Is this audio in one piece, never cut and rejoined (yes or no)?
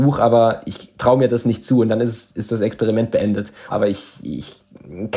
no